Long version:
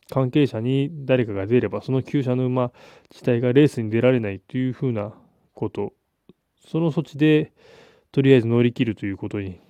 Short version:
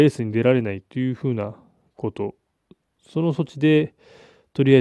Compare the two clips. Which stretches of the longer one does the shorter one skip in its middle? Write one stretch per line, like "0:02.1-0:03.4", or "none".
none